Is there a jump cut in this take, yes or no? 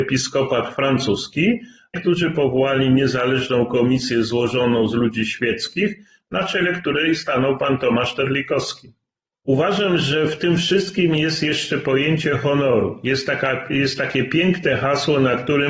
yes